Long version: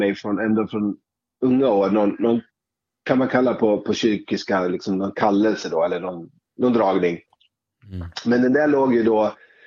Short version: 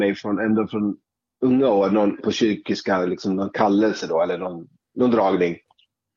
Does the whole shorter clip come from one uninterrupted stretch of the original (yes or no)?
no